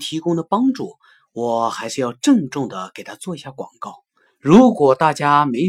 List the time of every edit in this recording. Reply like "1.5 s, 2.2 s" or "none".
4.3 s